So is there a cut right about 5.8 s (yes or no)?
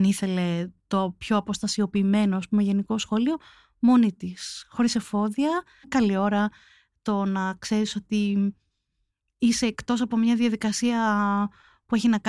yes